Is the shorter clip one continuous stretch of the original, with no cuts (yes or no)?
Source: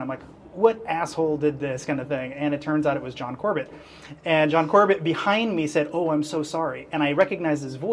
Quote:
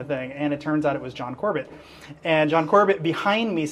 yes